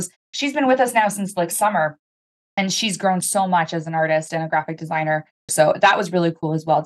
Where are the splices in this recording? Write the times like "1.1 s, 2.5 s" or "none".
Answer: 5.5 s